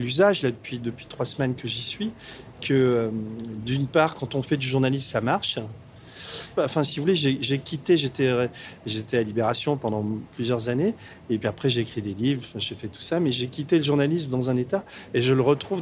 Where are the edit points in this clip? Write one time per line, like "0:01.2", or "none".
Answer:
0:06.6